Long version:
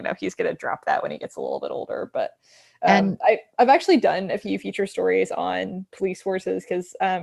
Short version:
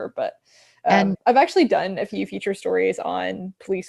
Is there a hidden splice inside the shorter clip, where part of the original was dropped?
yes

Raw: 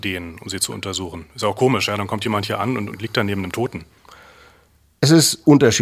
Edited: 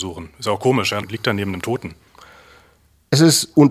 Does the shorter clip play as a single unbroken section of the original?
no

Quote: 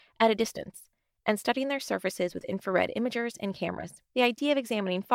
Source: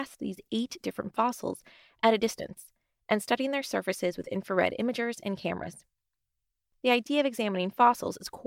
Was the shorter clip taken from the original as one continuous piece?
no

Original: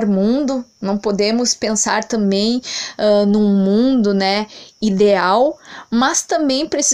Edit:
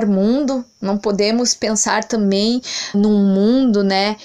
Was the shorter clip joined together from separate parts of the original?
yes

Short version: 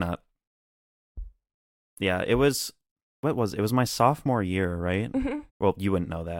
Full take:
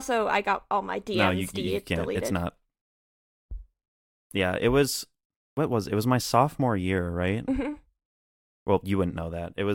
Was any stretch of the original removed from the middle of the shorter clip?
yes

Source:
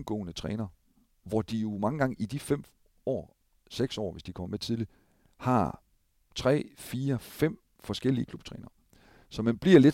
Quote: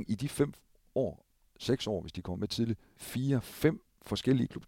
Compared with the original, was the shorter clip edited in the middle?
yes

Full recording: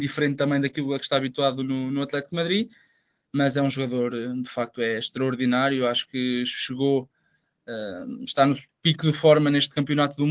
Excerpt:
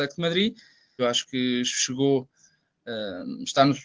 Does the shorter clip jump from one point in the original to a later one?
yes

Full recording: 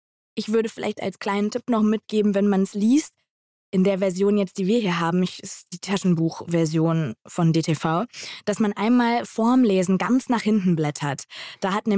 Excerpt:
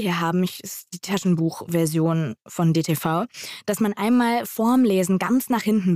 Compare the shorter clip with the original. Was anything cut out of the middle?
no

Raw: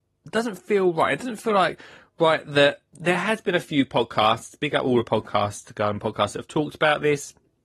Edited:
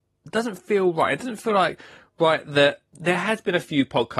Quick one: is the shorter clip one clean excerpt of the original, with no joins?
yes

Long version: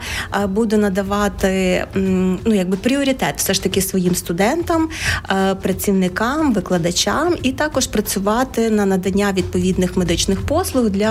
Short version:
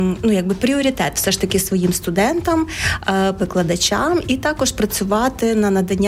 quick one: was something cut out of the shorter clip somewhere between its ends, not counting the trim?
yes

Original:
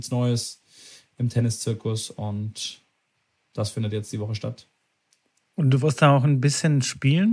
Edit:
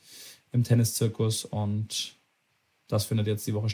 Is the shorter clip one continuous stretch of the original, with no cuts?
yes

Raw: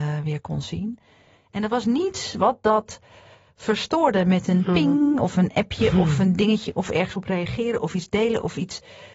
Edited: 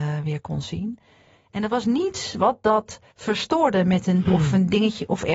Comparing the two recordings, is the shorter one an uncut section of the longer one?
no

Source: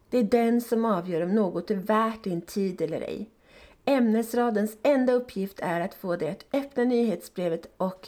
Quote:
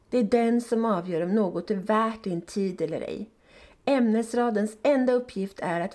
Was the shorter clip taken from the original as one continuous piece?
yes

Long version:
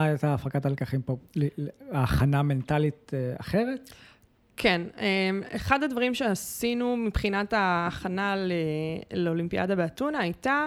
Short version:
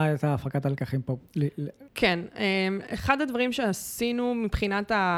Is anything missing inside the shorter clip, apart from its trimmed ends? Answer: yes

